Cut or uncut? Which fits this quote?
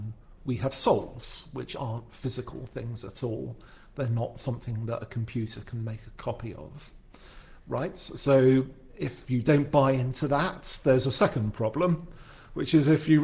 uncut